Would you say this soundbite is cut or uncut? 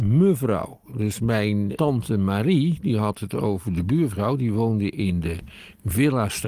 cut